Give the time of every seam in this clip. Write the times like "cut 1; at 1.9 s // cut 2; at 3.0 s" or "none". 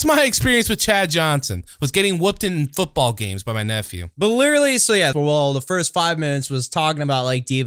cut 1; at 5.1 s